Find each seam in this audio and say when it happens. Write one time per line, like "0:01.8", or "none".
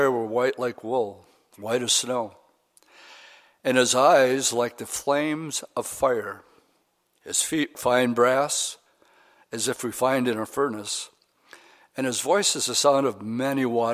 0:07.7